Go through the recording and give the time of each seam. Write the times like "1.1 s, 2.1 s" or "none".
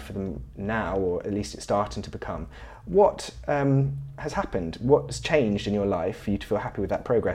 none